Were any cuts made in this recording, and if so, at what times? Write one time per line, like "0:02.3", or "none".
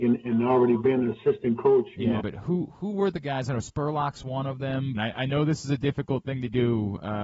0:02.2
0:04.9